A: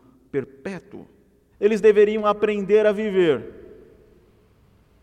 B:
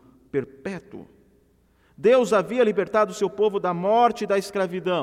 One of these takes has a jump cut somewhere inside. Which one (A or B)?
A